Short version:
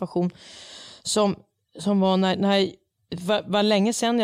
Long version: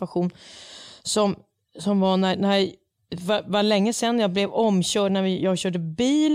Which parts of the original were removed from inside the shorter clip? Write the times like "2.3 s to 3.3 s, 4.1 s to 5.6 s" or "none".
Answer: none